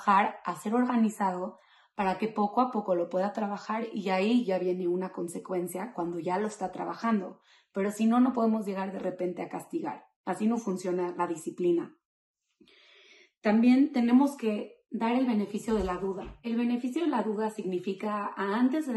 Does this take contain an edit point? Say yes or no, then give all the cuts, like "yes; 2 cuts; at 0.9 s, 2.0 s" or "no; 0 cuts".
no; 0 cuts